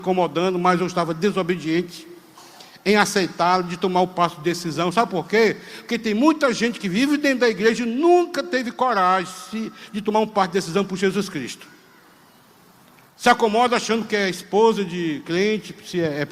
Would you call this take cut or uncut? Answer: uncut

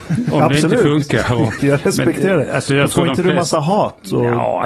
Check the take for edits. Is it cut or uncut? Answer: cut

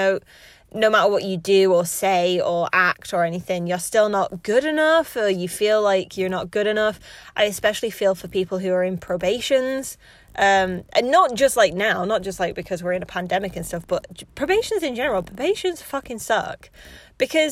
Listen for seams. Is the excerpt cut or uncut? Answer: uncut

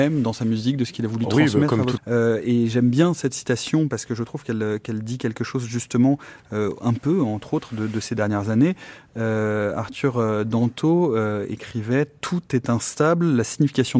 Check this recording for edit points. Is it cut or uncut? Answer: cut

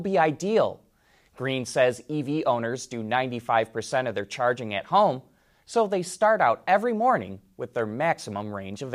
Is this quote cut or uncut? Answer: uncut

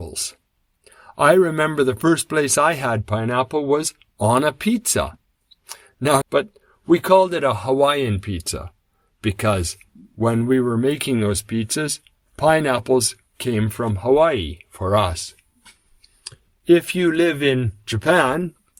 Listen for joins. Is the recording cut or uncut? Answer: cut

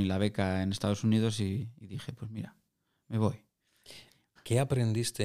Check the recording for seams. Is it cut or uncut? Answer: cut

